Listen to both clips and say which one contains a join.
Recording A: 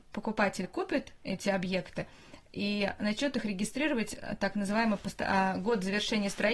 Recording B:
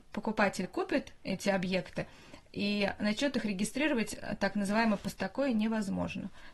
B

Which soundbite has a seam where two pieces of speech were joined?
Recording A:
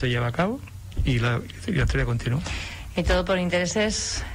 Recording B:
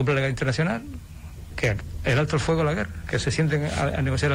B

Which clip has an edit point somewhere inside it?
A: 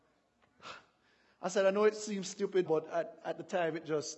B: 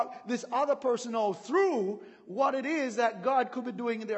A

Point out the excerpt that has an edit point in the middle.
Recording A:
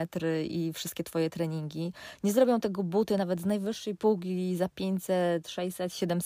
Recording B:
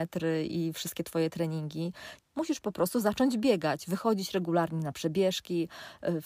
B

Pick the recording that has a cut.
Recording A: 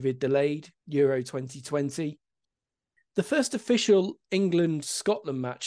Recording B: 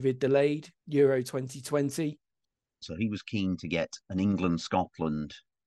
B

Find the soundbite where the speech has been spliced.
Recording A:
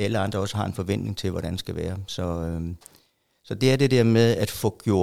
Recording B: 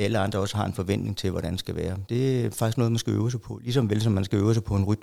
B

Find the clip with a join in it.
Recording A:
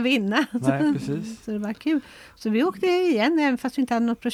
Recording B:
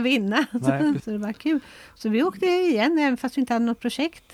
B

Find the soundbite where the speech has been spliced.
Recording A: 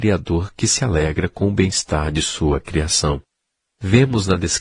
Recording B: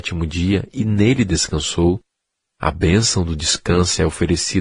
A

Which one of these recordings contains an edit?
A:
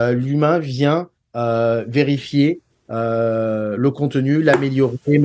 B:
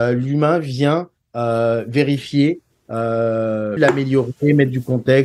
B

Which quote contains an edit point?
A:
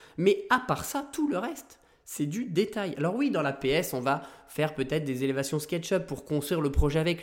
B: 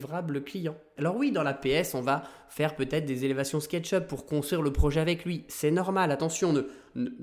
B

